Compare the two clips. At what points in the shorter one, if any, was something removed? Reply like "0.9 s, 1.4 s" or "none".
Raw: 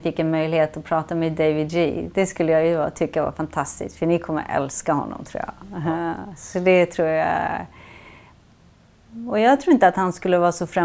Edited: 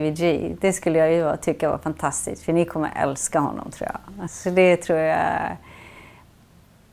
4.3 s